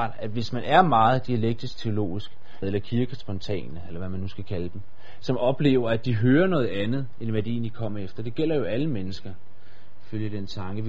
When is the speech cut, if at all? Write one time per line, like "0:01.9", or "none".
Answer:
0:02.6